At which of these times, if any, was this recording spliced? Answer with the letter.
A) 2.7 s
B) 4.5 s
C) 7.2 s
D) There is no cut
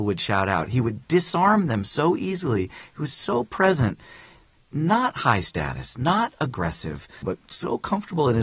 C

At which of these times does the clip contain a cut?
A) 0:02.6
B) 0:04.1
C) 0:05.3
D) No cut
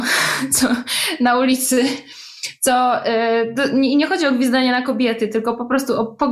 D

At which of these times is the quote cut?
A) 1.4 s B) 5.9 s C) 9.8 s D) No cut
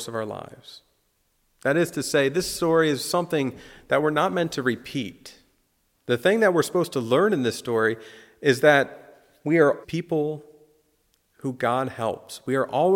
C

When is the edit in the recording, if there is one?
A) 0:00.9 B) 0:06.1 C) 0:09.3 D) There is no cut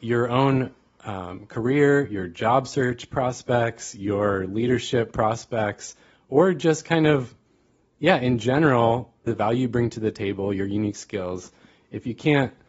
C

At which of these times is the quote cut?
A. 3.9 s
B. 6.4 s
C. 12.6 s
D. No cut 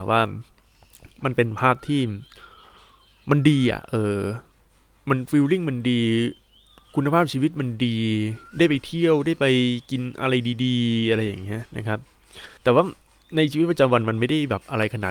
C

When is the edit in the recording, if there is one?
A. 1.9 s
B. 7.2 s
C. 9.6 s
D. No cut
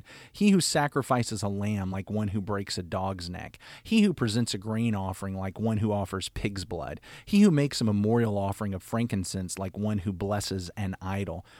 D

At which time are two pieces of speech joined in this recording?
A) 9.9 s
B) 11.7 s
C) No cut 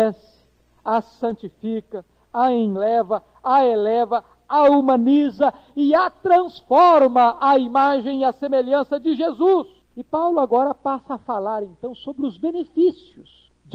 A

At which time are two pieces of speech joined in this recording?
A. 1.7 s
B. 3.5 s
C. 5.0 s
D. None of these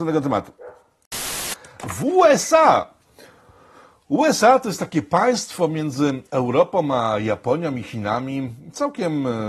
D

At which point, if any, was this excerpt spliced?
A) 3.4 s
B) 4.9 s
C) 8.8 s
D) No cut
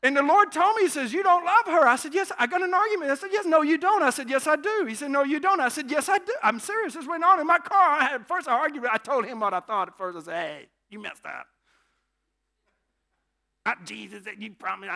A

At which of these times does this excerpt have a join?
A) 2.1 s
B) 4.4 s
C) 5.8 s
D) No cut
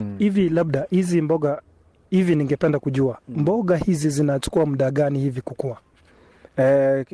D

